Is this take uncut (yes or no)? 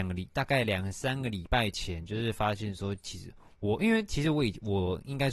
yes